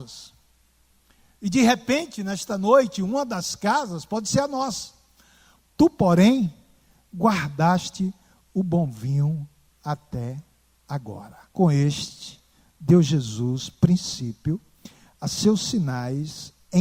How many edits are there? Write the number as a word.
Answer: two